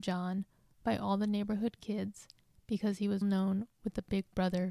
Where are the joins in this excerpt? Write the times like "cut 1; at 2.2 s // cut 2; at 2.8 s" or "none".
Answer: cut 1; at 3.2 s